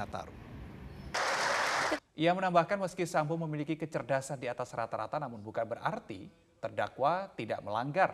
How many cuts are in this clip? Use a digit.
1